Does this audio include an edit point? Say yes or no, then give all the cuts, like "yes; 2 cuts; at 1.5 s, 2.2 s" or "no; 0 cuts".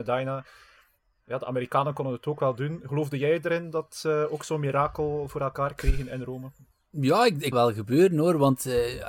yes; 1 cut; at 7.5 s